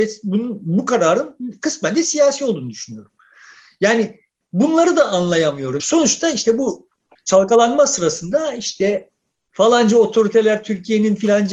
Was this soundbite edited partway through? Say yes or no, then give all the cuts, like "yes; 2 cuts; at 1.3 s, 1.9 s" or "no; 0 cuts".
yes; 1 cut; at 5.8 s